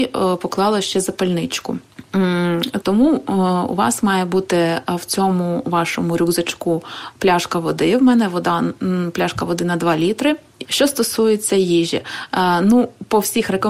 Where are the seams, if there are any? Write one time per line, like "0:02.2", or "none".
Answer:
0:02.8
0:10.6